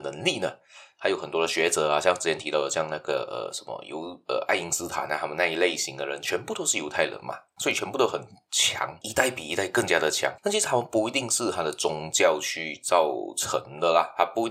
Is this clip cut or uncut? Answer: uncut